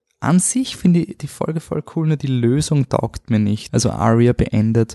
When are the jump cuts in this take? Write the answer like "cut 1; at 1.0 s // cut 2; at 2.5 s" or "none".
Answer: cut 1; at 3.7 s

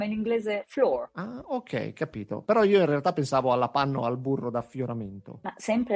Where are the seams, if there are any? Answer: none

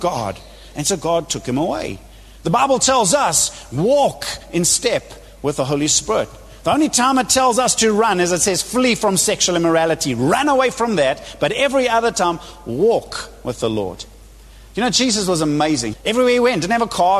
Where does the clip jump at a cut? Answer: cut 1; at 15.9 s

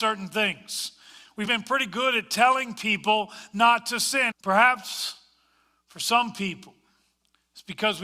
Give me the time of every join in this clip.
cut 1; at 1.5 s // cut 2; at 4.3 s

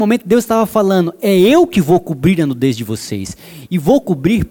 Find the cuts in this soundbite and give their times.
none

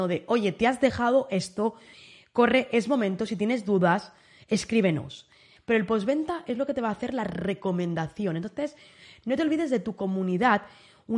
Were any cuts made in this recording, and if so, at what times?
cut 1; at 5.6 s

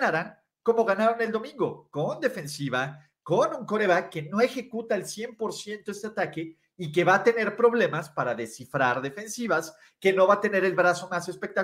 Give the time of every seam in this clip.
none

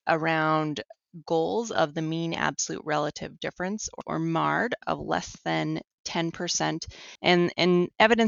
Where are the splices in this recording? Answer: none

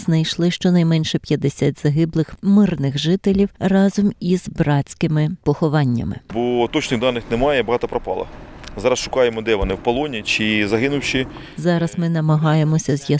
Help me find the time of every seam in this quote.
none

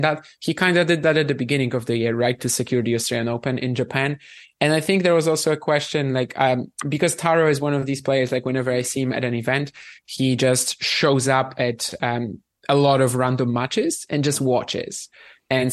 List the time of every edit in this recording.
none

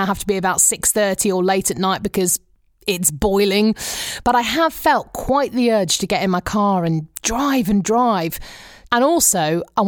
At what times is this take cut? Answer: cut 1; at 7.2 s // cut 2; at 8.9 s

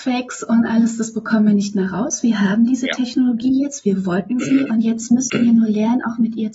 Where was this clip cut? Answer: none

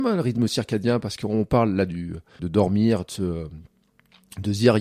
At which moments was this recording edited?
cut 1; at 2.4 s

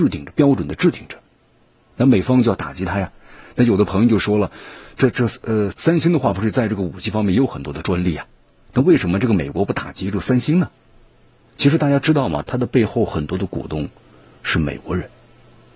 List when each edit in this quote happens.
cut 1; at 5.7 s // cut 2; at 12.4 s

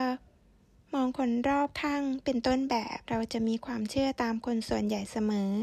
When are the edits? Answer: cut 1; at 3.0 s

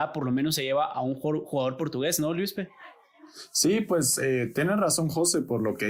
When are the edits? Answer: none

